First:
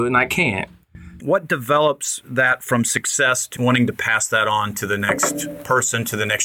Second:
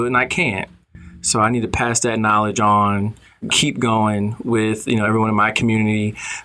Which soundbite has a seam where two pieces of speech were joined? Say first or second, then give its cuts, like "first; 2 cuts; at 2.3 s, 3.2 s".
first; 2 cuts; at 1.2 s, 3.6 s